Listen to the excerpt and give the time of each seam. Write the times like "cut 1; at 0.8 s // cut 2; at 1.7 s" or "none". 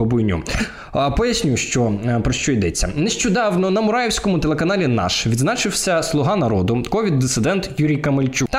none

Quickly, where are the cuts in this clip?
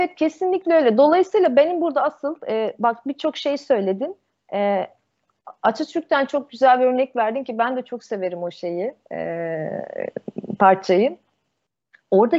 none

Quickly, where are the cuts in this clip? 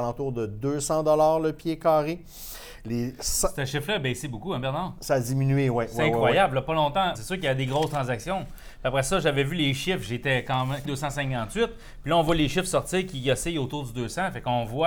cut 1; at 7.1 s // cut 2; at 10.8 s

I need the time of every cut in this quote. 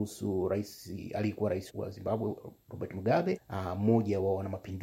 cut 1; at 1.7 s // cut 2; at 3.4 s

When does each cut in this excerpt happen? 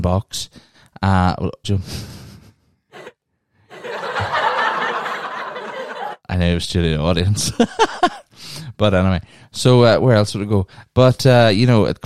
cut 1; at 1.6 s

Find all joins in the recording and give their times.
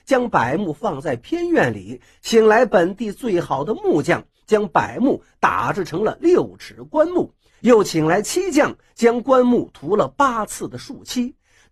none

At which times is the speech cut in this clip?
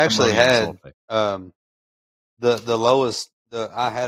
none

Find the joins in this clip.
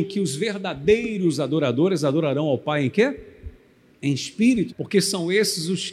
cut 1; at 4.7 s

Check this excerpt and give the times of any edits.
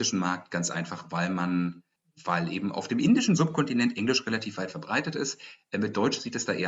none

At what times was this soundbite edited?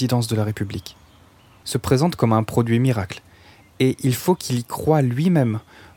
cut 1; at 1.6 s

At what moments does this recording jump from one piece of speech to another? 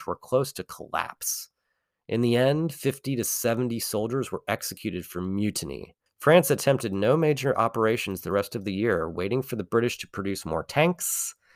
cut 1; at 6.1 s

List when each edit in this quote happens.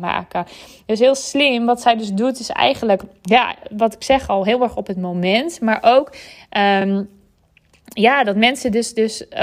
none

